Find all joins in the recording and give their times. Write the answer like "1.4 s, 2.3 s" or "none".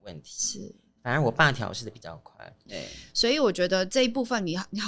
2.7 s

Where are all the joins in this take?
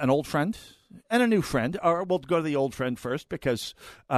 none

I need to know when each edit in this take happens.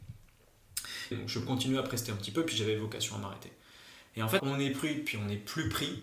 1.1 s, 4.4 s

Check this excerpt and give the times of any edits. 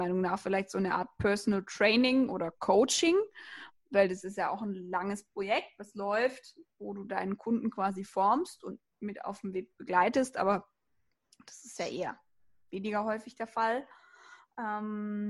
none

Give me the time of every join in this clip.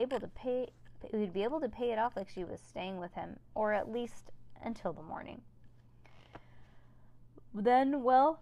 none

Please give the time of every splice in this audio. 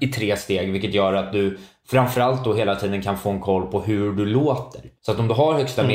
5.0 s

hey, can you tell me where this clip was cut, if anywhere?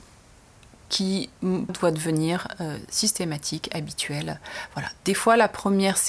1.7 s

